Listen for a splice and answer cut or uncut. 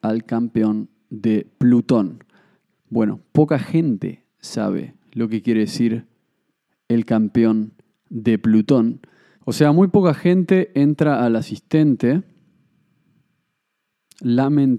cut